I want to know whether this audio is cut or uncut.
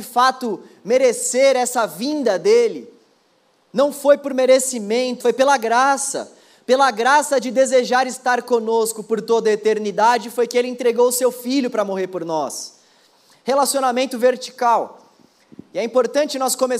cut